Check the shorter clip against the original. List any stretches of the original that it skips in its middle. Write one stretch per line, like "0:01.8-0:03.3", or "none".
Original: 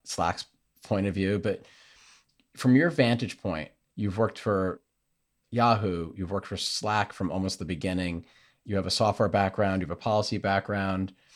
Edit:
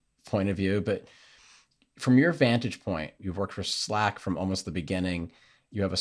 0:03.8-0:06.1